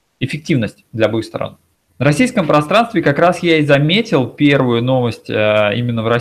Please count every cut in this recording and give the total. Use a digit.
1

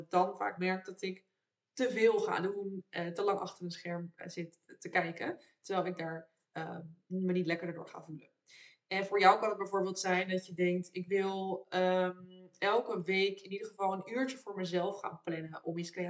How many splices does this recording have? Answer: 0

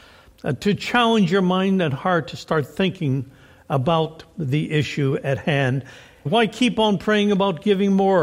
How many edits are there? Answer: 1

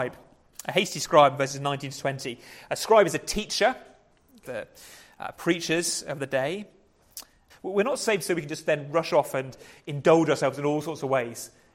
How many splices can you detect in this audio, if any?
2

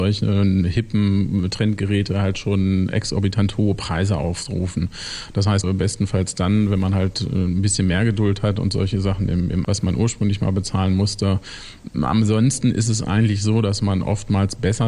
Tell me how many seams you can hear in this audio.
2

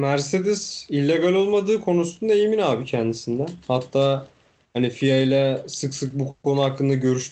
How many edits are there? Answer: 0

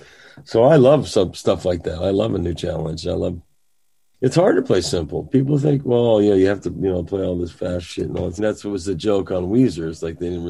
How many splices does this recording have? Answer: 1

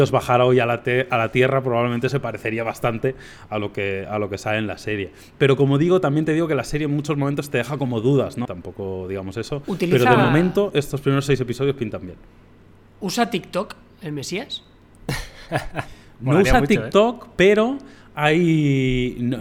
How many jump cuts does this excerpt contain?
1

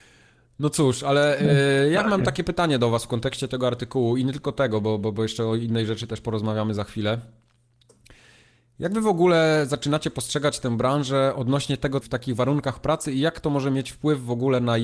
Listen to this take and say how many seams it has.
1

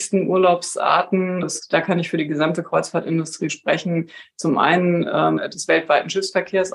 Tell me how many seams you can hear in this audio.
2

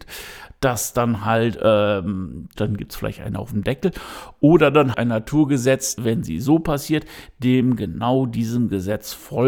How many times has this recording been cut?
3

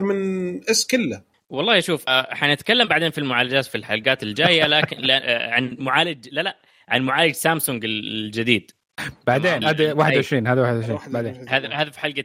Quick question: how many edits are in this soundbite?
1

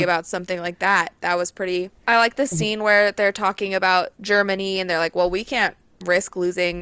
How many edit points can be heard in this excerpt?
2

